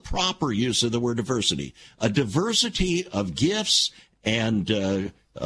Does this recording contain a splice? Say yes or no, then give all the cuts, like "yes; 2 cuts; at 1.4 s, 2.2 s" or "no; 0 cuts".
no; 0 cuts